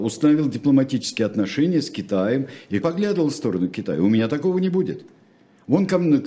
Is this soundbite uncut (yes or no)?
no